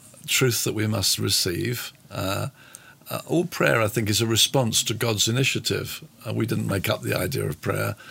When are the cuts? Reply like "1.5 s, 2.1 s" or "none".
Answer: 1.2 s